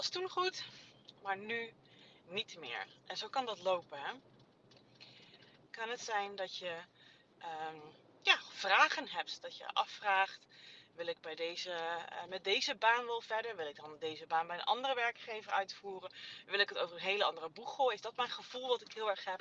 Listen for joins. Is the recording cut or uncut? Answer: cut